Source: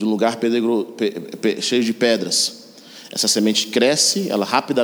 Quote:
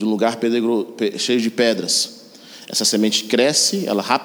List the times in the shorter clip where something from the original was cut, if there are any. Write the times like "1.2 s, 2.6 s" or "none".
1.1 s